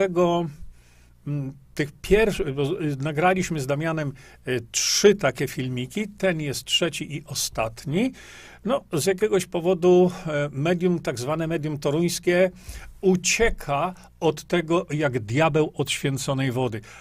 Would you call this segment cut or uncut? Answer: uncut